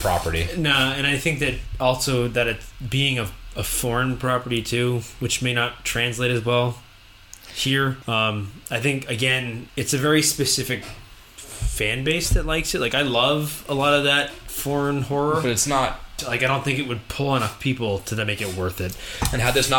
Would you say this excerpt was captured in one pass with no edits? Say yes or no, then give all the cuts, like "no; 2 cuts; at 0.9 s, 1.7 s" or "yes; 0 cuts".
no; 3 cuts; at 8.0 s, 9.7 s, 16.2 s